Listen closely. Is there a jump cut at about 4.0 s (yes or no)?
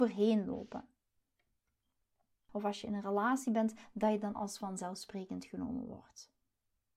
no